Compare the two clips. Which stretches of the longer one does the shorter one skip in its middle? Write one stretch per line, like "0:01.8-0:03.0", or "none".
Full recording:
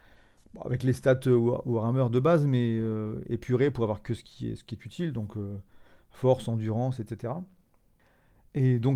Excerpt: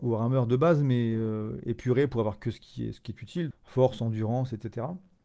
0:05.1-0:06.0